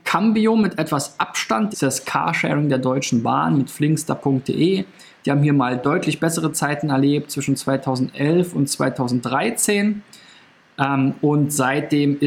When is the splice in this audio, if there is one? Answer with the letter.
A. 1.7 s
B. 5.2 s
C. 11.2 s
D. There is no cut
A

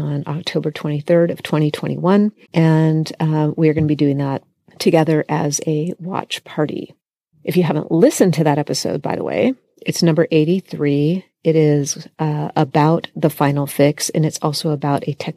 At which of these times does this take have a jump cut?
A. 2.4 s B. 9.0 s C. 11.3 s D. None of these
A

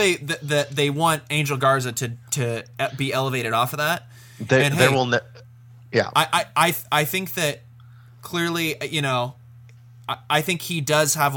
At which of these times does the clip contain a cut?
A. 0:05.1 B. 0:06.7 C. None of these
C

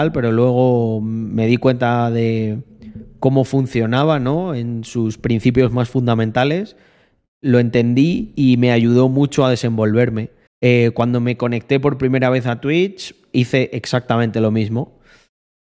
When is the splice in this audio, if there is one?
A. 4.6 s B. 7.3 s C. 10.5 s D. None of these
C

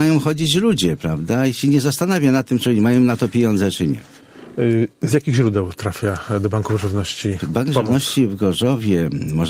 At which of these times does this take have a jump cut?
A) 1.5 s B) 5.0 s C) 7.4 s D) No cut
C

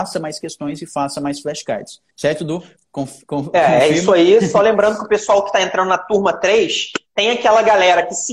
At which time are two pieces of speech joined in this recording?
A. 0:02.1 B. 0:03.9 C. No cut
A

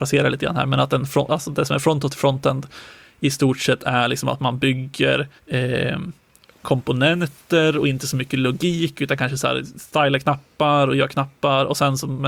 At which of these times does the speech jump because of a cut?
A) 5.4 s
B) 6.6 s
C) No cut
A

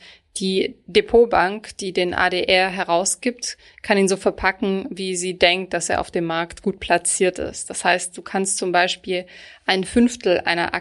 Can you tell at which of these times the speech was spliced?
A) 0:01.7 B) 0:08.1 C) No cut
C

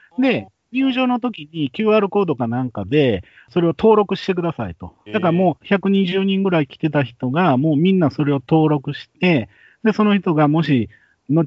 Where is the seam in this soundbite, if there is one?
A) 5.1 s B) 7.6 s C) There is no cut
A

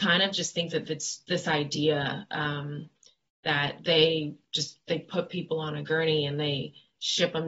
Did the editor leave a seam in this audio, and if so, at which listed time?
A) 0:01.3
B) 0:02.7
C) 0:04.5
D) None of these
A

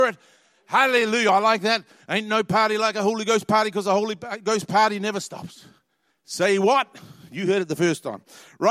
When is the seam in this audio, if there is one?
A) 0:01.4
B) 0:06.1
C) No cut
B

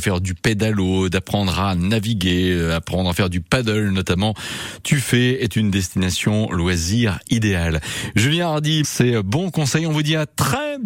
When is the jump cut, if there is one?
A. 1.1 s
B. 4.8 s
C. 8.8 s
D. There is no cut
C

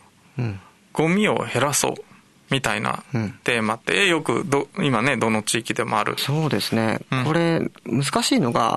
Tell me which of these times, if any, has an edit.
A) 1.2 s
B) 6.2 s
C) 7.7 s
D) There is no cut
B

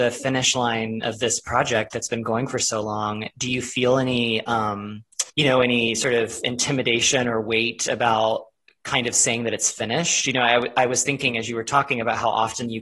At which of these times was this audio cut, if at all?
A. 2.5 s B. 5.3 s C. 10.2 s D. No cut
B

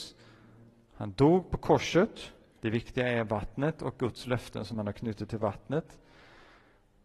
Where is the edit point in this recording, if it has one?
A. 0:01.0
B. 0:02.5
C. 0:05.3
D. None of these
B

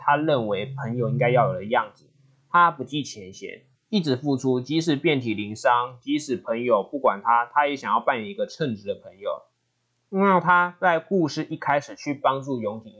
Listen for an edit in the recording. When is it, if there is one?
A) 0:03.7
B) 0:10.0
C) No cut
A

